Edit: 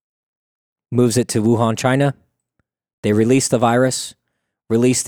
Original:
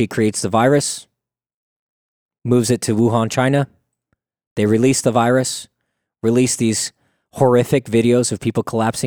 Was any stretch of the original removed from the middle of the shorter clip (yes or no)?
no